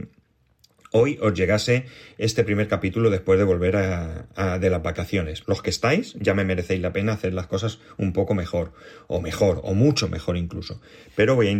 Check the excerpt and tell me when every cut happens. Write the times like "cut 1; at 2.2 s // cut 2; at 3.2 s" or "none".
cut 1; at 5.4 s